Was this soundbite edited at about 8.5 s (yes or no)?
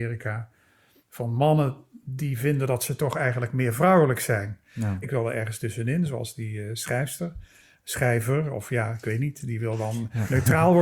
no